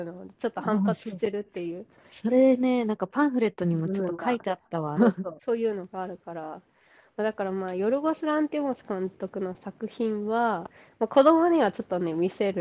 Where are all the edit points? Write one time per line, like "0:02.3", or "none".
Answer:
0:05.0